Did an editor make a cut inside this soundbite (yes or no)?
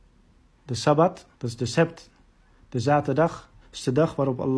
yes